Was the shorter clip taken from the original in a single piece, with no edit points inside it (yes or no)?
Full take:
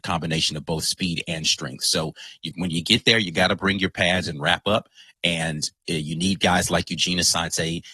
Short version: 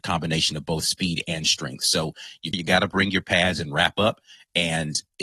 no